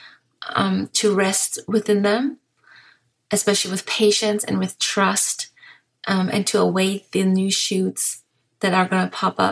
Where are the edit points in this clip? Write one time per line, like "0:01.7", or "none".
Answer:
none